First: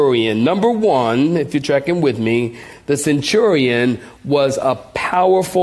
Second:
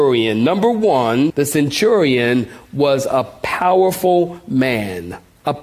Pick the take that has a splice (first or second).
second